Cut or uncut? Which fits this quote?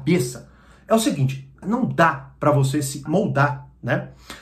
cut